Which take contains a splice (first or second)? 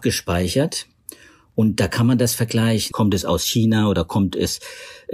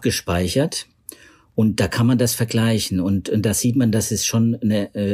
first